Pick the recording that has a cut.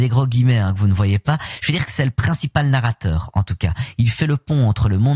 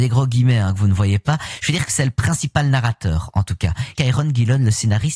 second; 1 cut; at 4.0 s

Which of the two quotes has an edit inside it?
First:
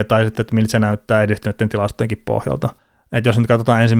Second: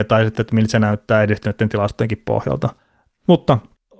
second; 1 cut; at 3.1 s

